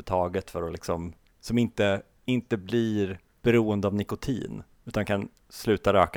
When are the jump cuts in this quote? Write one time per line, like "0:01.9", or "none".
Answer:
0:01.3